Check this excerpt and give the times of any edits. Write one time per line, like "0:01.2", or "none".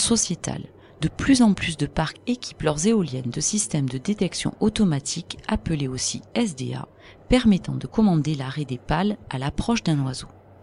none